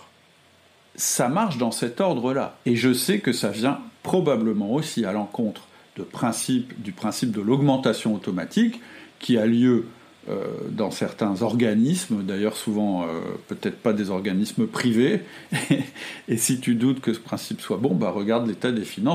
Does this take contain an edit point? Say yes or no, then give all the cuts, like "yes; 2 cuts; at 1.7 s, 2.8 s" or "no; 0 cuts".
yes; 1 cut; at 2.6 s